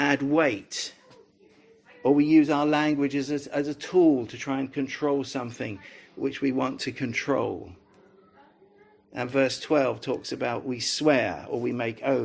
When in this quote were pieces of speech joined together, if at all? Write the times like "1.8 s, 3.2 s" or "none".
none